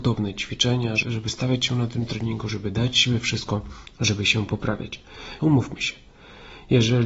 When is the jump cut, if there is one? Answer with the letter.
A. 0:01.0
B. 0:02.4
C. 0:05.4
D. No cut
C